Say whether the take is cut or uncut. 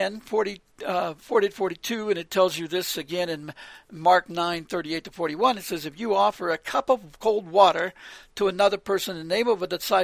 uncut